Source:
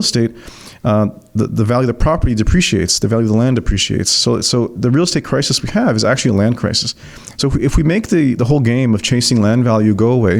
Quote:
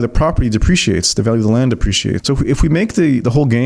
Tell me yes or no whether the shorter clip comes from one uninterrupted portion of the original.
no